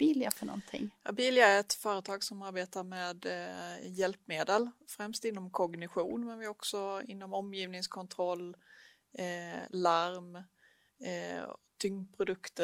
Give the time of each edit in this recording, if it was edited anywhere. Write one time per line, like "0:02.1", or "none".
none